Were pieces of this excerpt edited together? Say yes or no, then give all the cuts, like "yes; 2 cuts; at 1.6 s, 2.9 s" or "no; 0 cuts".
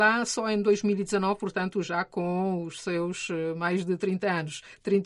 no; 0 cuts